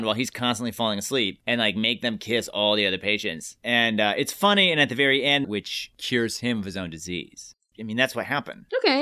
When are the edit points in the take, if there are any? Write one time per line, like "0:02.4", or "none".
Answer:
0:05.4
0:07.7